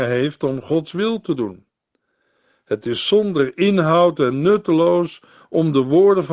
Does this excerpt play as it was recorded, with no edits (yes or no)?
yes